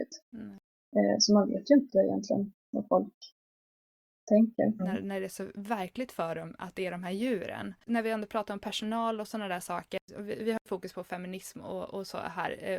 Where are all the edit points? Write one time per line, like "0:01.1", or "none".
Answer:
0:04.8
0:07.9